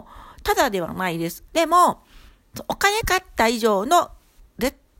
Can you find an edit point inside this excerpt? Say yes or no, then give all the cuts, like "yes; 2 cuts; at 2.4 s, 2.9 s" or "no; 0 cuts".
yes; 2 cuts; at 1.5 s, 3.0 s